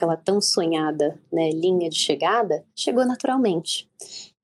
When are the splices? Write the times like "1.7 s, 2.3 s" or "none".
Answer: 2.7 s